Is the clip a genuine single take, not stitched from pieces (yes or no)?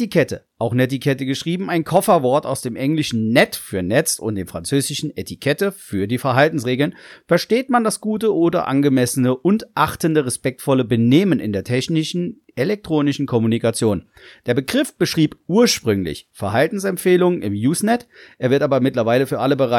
yes